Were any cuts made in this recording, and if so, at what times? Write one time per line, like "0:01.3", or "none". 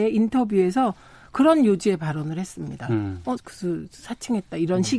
0:03.4